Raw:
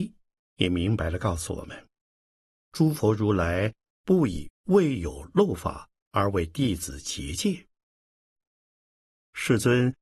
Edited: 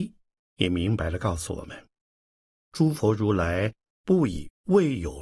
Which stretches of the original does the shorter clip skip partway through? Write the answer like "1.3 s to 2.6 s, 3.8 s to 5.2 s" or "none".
none